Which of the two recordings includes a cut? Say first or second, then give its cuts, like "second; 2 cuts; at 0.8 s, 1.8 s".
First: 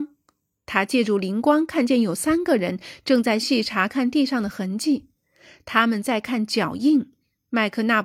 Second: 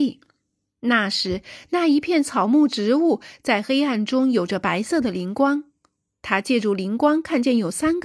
first; 1 cut; at 3.4 s